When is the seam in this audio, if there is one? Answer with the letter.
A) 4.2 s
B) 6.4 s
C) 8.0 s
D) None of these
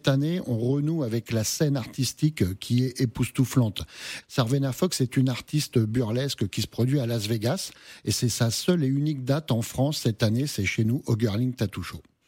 A